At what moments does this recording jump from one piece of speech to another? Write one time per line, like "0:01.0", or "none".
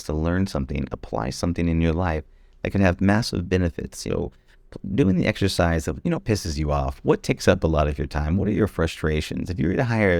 none